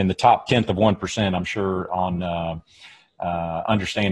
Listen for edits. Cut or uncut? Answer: uncut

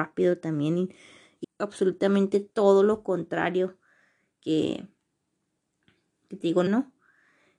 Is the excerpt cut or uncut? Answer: cut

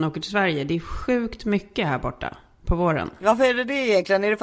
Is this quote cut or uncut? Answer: uncut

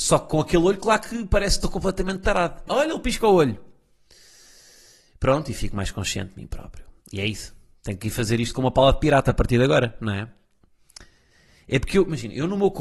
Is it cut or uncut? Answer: cut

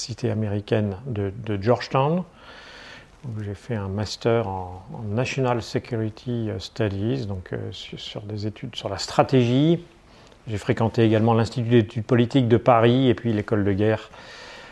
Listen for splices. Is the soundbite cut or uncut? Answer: uncut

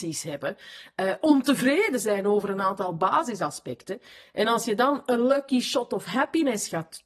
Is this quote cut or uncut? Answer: uncut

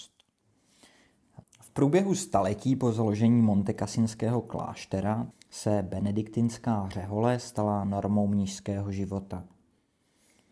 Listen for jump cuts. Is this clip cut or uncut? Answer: cut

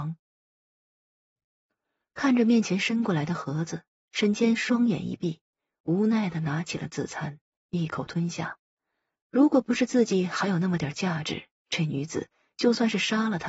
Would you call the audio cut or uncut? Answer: cut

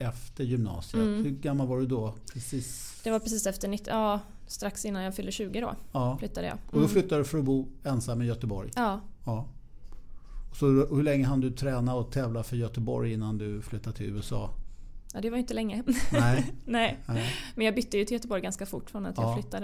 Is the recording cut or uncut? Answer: uncut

